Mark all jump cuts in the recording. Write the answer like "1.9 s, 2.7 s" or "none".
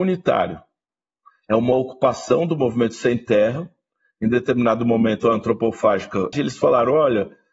6.3 s